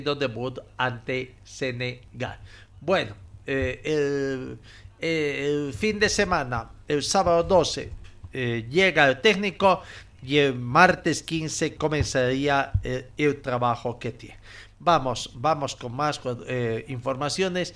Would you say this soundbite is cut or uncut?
uncut